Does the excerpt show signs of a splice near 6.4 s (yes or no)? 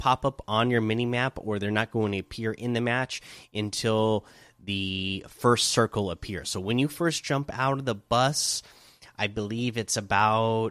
no